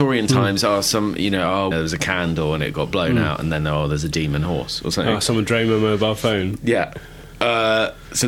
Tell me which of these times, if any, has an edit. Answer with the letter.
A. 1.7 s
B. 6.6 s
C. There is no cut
A